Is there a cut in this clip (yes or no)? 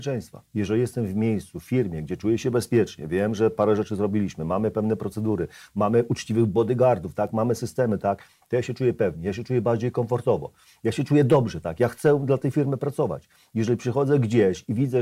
yes